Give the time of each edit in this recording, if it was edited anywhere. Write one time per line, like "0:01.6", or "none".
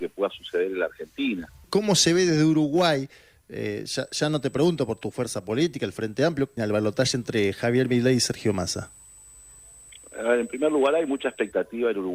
0:01.6
0:06.6

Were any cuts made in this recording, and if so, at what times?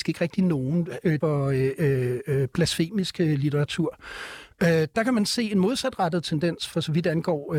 0:01.2

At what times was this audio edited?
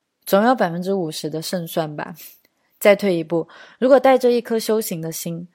none

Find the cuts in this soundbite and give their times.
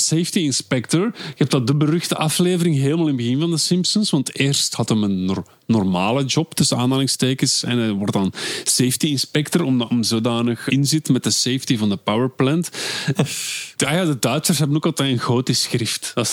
0:10.7
0:13.1

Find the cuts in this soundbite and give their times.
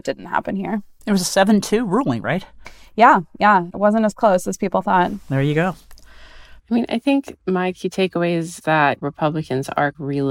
0:06.6

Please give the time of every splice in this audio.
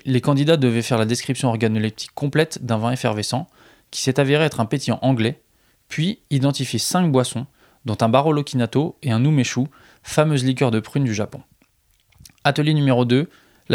none

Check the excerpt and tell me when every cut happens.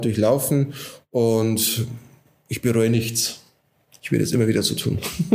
none

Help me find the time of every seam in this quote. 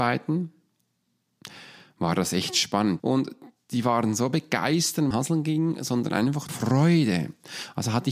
0:03.0
0:05.1
0:06.5

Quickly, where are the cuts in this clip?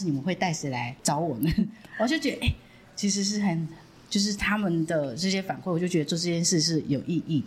0:01.0

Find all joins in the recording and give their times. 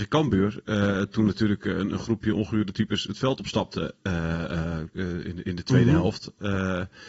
none

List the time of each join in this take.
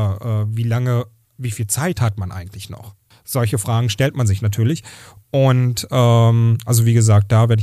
0:03.1

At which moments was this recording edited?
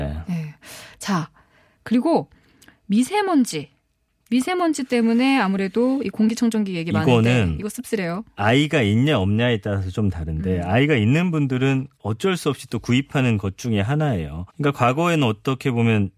0:14.5

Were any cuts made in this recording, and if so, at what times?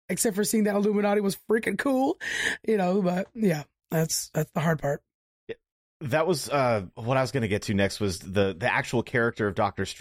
none

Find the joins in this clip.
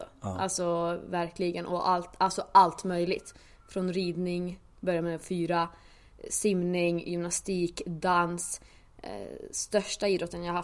none

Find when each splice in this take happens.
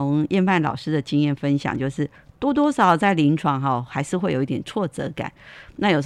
none

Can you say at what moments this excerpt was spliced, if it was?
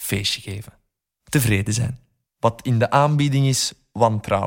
0:02.3

